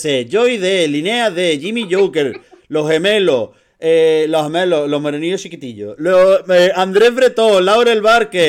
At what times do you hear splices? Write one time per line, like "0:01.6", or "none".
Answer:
none

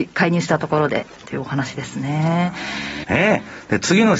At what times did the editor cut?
0:03.0

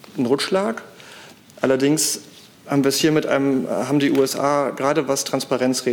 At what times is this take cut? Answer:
none

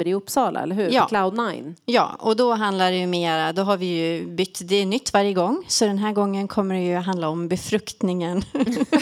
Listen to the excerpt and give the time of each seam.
none

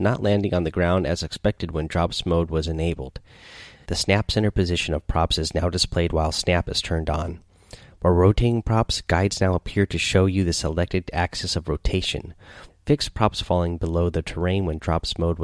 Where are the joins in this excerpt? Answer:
0:03.8
0:12.7

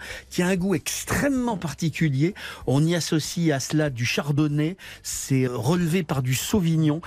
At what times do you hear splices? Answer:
0:05.5

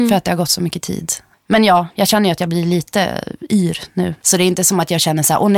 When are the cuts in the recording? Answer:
0:01.3
0:04.2

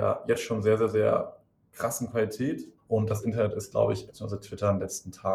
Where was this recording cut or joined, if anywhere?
0:02.8
0:04.1

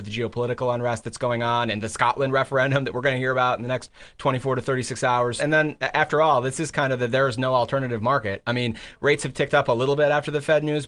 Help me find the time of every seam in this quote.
0:05.4

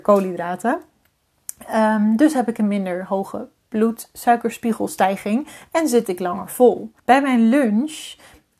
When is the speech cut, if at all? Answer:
0:07.0

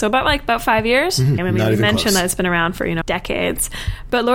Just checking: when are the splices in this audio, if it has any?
0:01.4
0:03.0

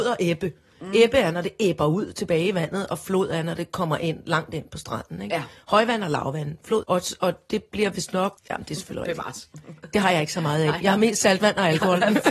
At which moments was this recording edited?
0:06.8
0:08.4

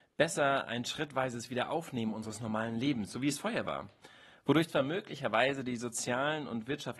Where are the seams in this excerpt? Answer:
none

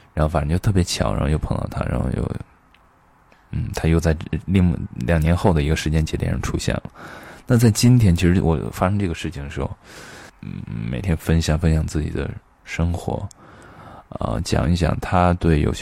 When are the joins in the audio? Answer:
0:10.3

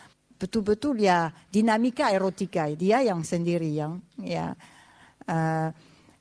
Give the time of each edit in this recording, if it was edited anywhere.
none

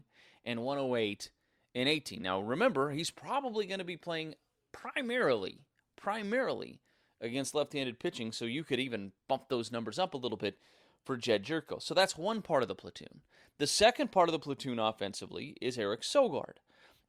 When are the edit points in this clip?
none

